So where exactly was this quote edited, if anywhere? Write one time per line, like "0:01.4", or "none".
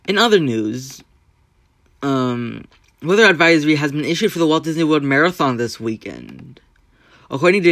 none